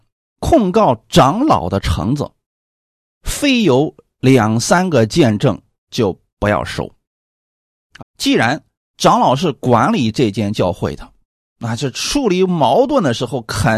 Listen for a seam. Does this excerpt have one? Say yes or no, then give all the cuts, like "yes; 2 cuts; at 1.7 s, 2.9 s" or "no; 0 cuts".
yes; 1 cut; at 8.0 s